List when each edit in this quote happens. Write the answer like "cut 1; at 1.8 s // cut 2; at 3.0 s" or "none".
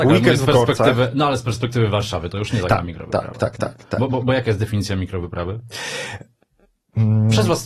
none